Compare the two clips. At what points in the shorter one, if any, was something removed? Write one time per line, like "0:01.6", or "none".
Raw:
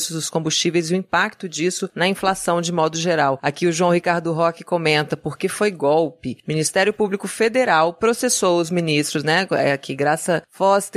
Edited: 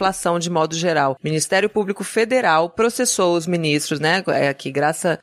0:01.2